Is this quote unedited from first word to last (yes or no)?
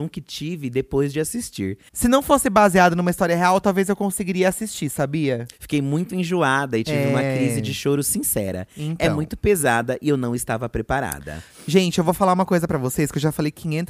no